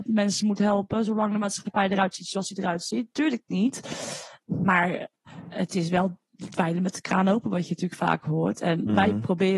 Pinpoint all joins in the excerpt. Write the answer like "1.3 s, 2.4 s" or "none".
none